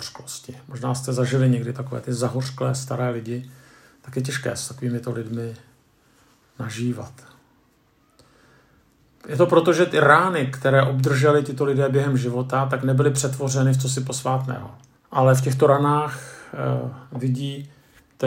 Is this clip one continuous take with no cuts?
no; 1 cut; at 14.9 s

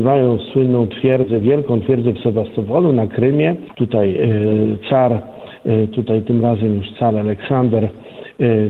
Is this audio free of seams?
no; 1 cut; at 3.7 s

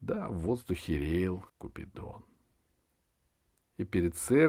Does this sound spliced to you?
yes; 1 cut; at 1.5 s

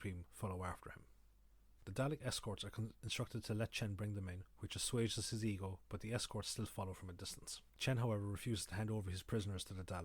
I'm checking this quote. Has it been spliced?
yes; 2 cuts; at 1.8 s, 7.7 s

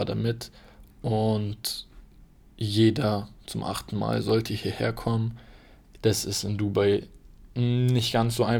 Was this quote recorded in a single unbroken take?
no; 1 cut; at 6.0 s

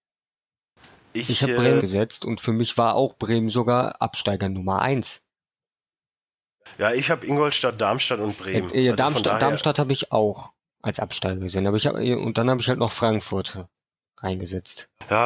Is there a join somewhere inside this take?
yes; 1 cut; at 1.8 s

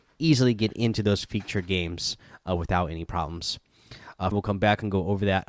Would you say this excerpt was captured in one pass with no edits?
no; 1 cut; at 4.3 s

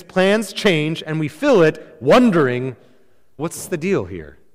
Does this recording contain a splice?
yes; 1 cut; at 3.4 s

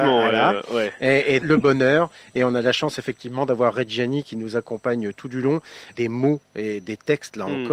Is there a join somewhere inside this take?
yes; 2 cuts; at 1.4 s, 5.9 s

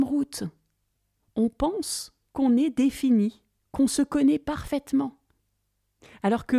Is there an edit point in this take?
no; 0 cuts

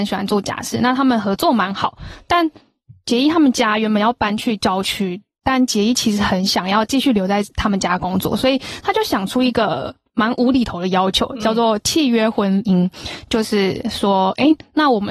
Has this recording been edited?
no; 0 cuts

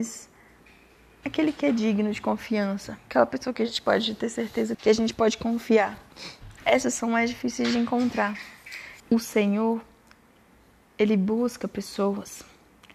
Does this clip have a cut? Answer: yes; 2 cuts; at 4.7 s, 9.0 s

